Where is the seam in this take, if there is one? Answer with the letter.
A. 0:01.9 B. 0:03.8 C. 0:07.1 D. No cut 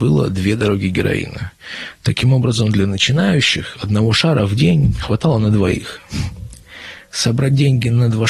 D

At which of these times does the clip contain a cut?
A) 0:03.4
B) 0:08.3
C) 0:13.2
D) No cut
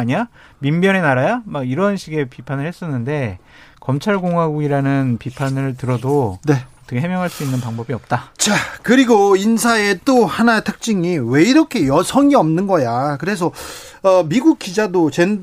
D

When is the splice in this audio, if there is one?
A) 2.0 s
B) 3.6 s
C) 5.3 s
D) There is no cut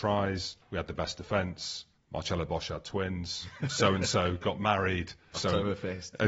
C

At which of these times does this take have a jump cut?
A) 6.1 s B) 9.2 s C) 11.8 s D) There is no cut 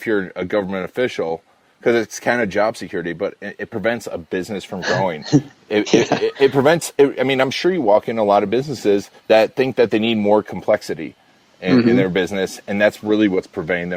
B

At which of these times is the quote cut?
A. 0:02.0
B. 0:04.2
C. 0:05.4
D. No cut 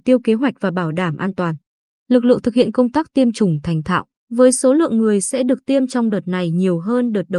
B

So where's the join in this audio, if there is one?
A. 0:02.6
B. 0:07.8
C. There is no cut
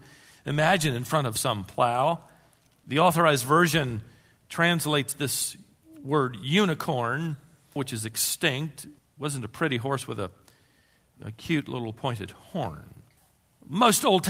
B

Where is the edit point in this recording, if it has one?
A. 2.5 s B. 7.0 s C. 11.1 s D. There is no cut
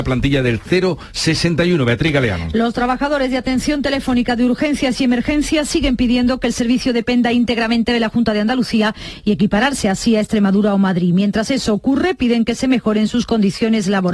D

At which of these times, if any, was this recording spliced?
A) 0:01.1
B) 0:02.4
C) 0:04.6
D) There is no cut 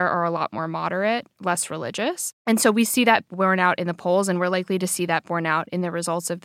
D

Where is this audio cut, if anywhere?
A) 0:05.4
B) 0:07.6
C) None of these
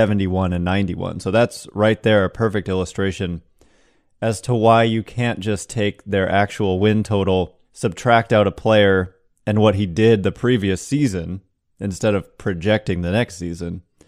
B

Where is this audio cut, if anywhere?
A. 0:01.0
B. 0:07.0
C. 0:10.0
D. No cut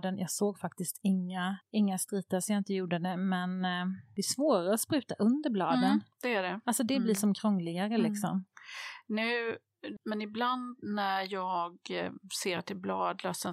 C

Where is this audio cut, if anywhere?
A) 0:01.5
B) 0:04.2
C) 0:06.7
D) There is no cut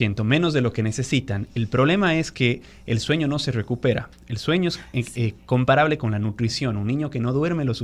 D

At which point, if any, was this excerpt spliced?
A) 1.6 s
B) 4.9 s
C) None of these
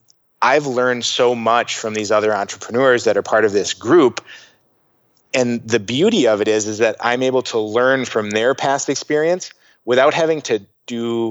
C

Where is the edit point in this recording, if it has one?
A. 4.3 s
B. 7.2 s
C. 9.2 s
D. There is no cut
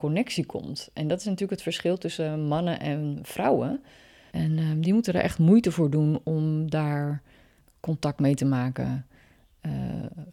A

